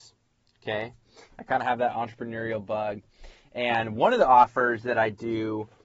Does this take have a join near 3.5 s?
no; 1 cut; at 1.3 s

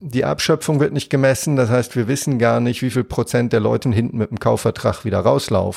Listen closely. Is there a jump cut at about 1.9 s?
no; 1 cut; at 3.8 s

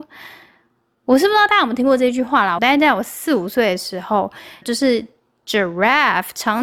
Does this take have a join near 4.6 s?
yes; 2 cuts; at 2.6 s, 4.6 s

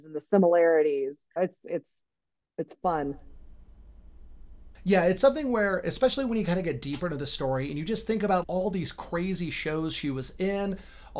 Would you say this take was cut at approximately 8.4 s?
yes; 3 cuts; at 1.4 s, 4.7 s, 8.4 s

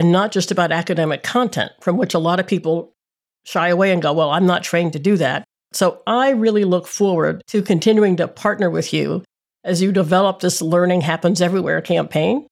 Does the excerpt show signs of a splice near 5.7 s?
yes; 1 cut; at 5.7 s

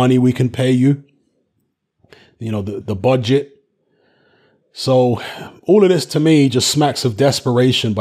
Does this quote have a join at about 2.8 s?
yes; 1 cut; at 2.8 s

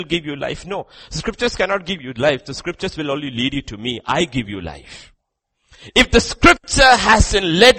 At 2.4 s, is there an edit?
no; 0 cuts

